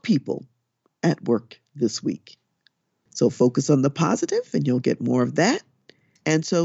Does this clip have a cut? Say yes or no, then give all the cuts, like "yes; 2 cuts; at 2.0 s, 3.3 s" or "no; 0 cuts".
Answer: yes; 1 cut; at 3.1 s